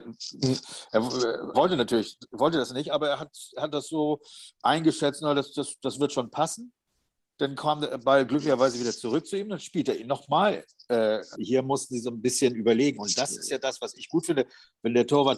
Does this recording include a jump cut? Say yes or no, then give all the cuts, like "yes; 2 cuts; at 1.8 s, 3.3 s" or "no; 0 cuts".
yes; 2 cuts; at 1.5 s, 11.3 s